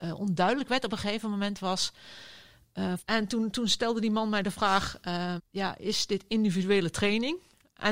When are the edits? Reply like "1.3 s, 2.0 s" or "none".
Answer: 3.0 s, 5.4 s

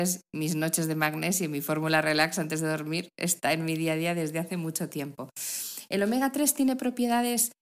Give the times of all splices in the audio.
none

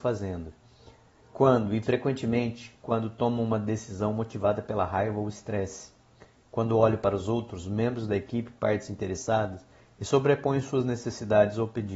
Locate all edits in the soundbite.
none

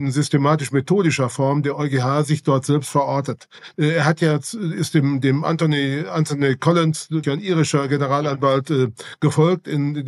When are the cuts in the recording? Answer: 3.7 s, 7.2 s

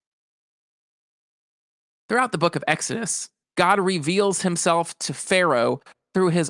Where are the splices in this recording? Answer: 3.4 s

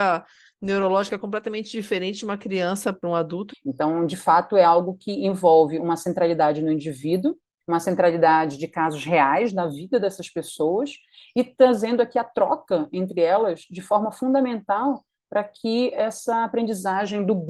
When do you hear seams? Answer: 3.5 s

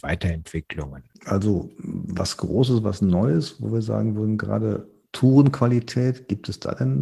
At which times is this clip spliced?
none

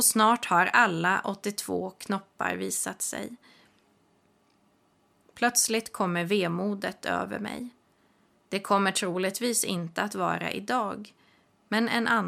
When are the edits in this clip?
8.4 s

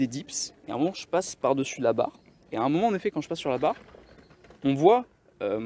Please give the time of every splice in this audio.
2.4 s

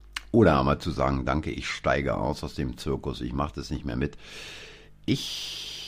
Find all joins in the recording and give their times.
none

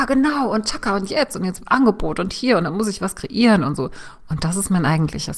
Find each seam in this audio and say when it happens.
4.2 s

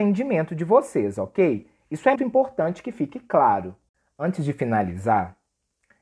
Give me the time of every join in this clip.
2.1 s

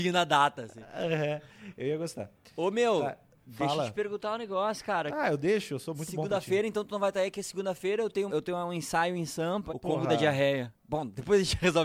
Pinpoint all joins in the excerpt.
8.3 s, 9.7 s, 10.8 s

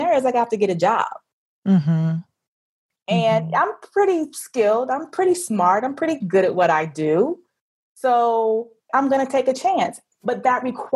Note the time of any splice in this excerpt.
8.9 s

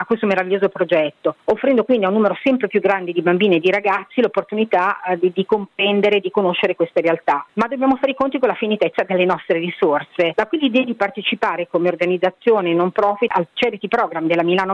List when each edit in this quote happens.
none

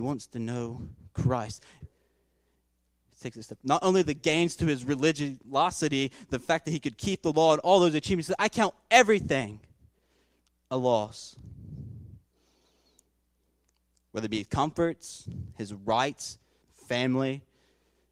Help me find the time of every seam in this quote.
1.8 s, 16.6 s

